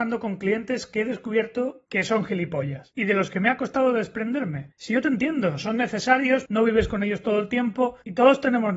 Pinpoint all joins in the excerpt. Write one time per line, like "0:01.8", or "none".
0:06.5